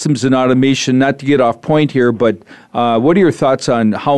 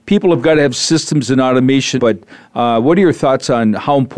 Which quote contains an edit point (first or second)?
second